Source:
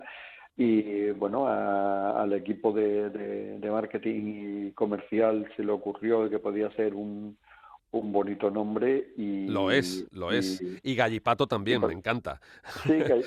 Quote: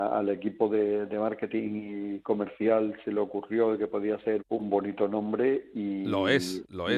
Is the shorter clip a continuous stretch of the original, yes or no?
no